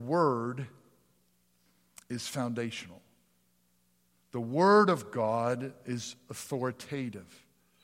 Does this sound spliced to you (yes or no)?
no